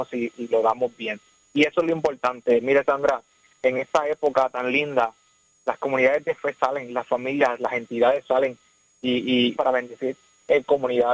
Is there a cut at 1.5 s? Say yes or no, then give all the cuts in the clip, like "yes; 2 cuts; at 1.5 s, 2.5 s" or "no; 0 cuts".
no; 1 cut; at 9.5 s